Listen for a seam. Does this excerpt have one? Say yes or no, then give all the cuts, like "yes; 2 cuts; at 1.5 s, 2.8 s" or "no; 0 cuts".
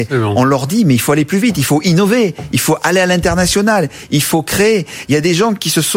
no; 0 cuts